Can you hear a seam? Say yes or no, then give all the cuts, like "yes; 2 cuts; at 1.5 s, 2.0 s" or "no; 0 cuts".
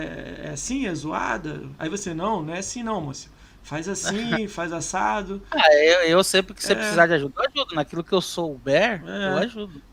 no; 0 cuts